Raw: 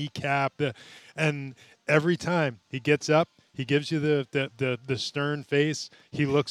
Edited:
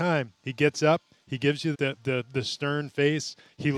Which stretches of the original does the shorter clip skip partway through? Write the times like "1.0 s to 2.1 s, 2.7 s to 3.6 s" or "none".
4.0 s to 4.3 s